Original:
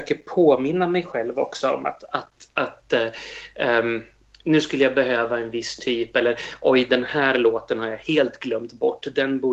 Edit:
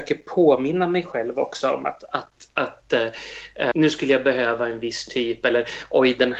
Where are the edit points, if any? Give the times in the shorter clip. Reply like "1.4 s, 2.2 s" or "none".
3.7 s

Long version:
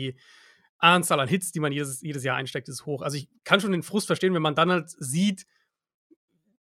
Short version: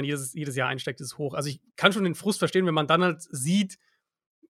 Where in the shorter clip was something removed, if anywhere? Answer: none

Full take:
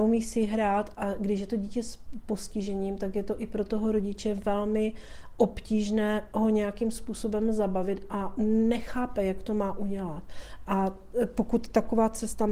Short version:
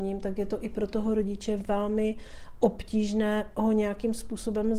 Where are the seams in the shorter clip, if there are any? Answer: none

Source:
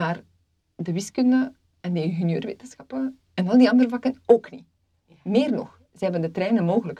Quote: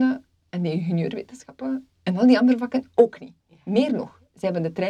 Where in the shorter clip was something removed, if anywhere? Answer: 3.4 s

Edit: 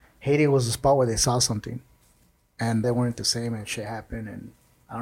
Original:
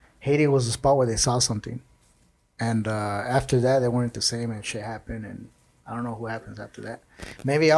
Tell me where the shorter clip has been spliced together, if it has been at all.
2.8 s

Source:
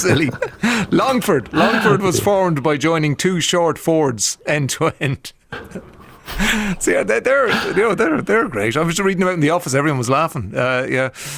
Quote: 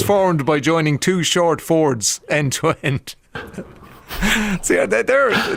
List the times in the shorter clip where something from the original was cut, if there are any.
none

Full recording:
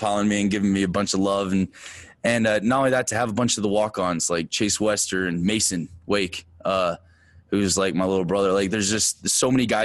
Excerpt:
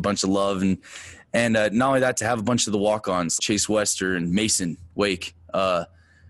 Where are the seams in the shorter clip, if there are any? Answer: 3.4 s

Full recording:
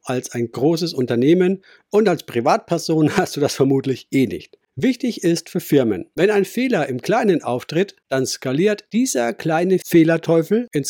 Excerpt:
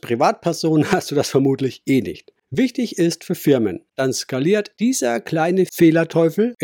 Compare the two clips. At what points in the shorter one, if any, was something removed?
3.9 s

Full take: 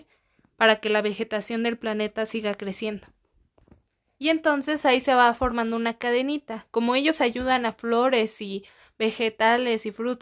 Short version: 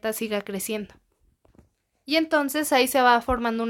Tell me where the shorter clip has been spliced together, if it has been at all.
none

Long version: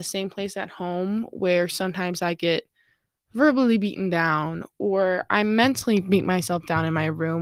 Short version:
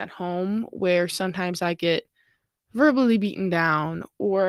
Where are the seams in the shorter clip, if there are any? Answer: none

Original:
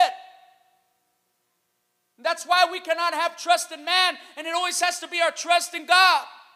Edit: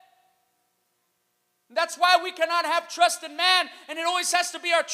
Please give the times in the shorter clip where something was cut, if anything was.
none

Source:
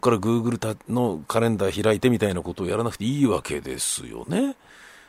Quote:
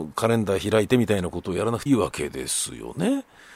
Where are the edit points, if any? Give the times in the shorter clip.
1.9 s

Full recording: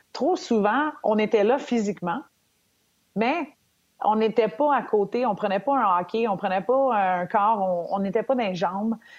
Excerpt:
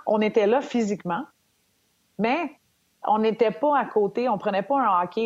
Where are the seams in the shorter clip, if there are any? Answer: none

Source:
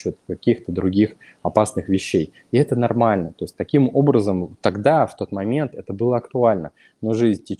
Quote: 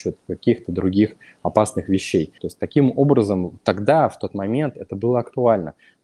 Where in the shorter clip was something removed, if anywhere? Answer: 2.4 s

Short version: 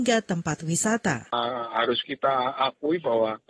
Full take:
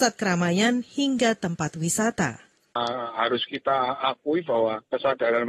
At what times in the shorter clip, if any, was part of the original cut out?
1.3 s

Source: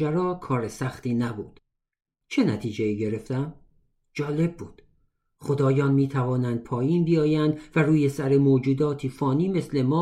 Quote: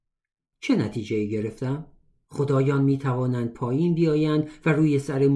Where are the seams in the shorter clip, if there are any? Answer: 2.2 s

